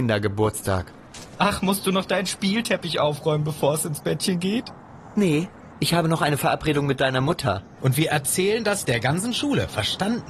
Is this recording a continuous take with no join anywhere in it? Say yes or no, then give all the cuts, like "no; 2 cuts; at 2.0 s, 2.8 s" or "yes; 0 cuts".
no; 1 cut; at 7.8 s